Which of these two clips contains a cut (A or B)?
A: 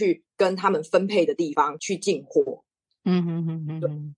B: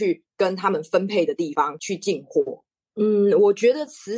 B